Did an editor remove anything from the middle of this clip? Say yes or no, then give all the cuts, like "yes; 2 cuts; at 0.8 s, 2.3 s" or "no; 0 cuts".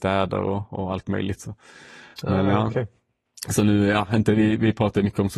no; 0 cuts